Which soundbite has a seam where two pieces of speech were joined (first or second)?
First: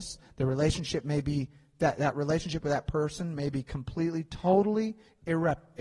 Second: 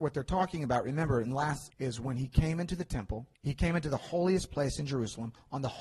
second